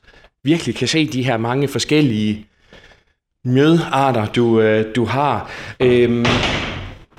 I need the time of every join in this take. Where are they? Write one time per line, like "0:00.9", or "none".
none